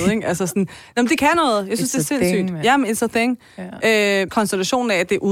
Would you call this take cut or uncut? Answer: cut